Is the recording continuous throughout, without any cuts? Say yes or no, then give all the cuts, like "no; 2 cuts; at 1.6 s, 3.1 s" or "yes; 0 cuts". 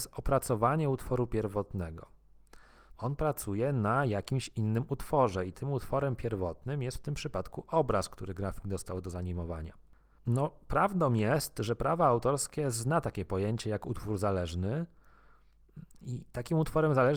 no; 2 cuts; at 3.0 s, 10.2 s